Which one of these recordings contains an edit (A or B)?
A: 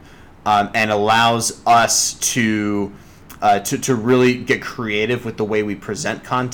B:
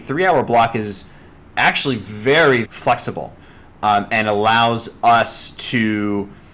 B